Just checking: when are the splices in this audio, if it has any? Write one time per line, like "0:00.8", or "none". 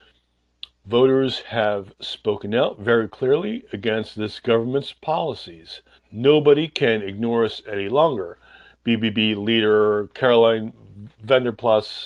0:06.0